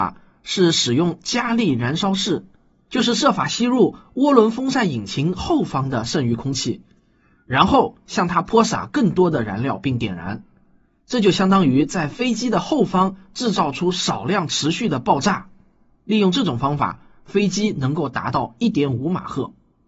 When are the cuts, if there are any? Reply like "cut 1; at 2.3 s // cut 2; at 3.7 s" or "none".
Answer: none